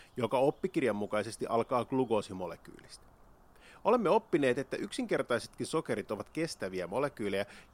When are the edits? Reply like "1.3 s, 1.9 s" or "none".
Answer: none